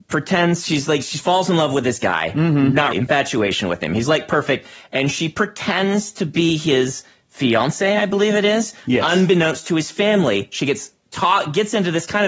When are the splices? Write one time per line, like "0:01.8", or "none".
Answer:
0:02.9